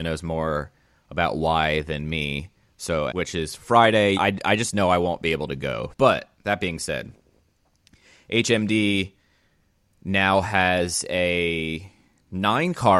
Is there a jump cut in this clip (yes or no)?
yes